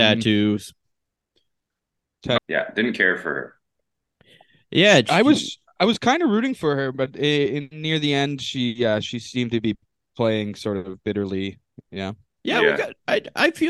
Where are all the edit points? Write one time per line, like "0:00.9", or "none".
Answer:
0:02.4